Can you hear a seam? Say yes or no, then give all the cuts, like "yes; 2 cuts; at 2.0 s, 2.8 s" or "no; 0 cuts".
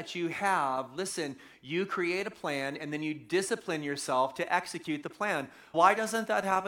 yes; 1 cut; at 5.7 s